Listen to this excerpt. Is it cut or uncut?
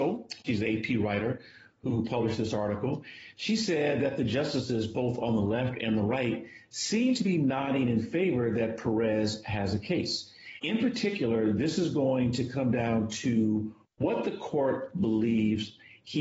uncut